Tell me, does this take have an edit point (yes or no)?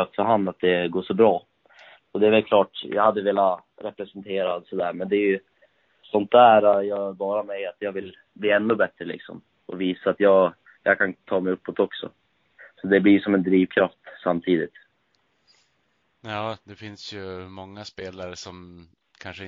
no